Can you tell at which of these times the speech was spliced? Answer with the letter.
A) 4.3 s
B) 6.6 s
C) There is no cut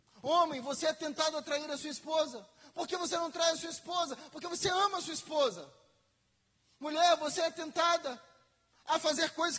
C